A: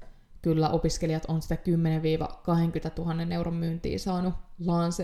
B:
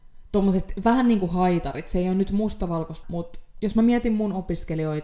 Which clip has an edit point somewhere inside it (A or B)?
B